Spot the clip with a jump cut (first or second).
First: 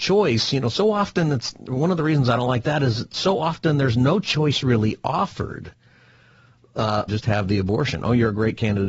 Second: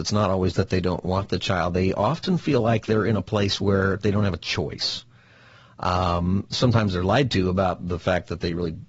first